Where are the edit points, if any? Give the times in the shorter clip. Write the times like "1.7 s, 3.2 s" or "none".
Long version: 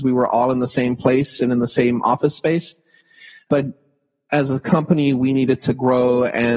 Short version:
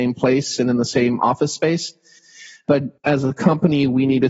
3.0 s